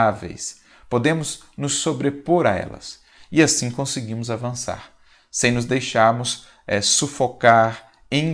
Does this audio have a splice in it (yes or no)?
no